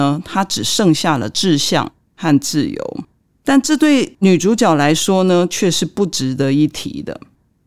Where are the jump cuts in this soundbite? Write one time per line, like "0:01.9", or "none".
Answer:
none